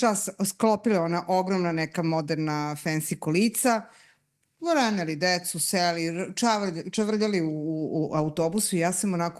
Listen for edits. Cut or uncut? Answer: uncut